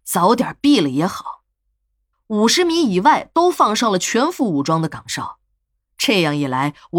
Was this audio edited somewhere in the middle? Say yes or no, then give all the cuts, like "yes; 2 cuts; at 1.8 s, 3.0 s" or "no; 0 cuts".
yes; 1 cut; at 2.1 s